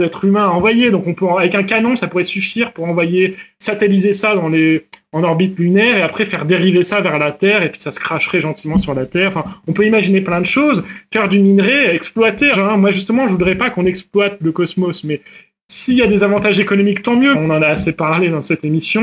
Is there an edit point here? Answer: yes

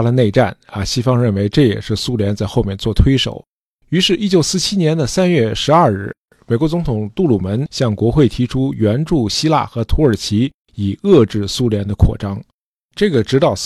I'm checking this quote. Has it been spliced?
no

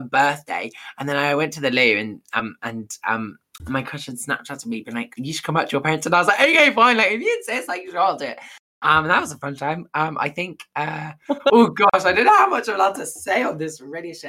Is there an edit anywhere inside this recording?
no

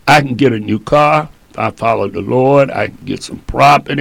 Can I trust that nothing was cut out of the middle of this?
yes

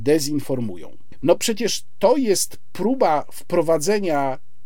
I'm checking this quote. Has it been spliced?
yes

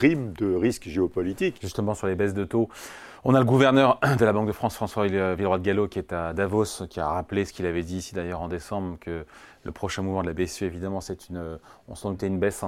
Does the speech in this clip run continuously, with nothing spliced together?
no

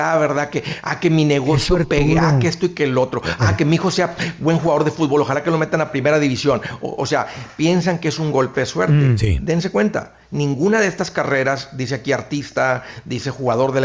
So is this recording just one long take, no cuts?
yes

